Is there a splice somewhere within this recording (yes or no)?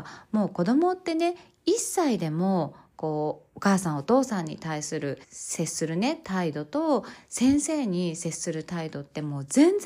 yes